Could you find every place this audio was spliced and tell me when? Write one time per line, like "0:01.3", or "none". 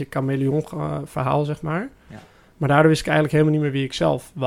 none